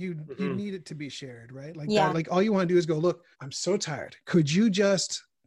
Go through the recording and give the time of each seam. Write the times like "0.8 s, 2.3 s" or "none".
2.1 s, 3.3 s

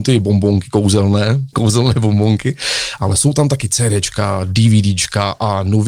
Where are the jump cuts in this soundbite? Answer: 1.5 s

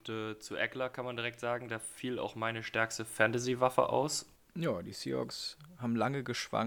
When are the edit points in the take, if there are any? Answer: 4.4 s

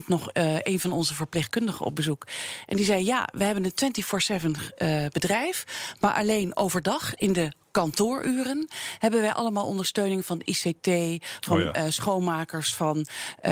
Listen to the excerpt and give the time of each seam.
none

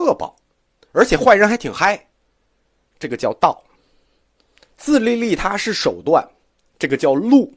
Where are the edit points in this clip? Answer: 2.9 s

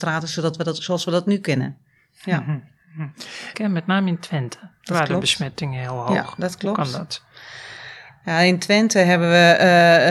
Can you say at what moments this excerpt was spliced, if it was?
3.5 s

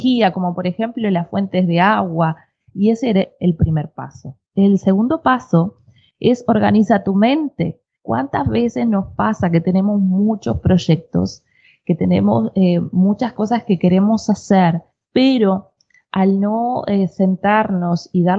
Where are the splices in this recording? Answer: 2.7 s

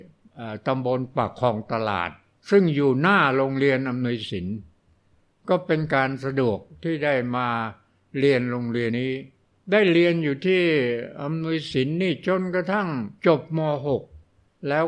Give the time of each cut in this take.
8.9 s, 13.2 s

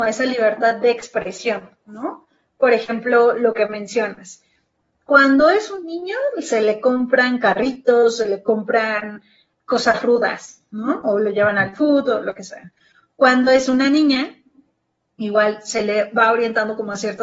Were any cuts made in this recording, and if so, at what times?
none

